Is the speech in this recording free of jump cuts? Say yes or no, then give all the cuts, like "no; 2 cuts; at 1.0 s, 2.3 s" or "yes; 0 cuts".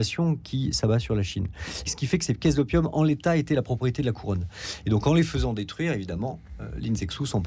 no; 1 cut; at 1.8 s